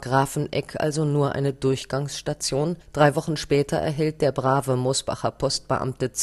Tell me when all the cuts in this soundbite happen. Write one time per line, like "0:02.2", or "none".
0:02.8